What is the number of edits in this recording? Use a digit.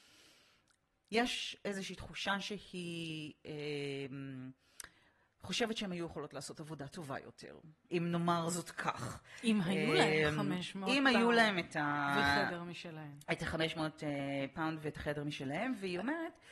1